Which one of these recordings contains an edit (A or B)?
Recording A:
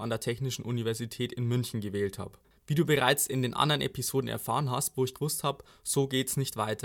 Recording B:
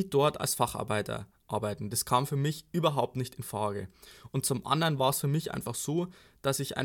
A